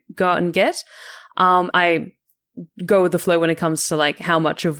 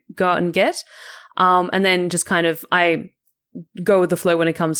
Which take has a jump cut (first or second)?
first